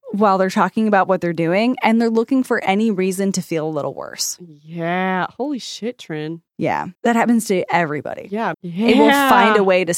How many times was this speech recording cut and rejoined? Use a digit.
2